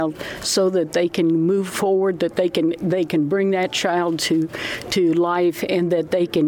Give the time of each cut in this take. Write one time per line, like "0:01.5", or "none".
none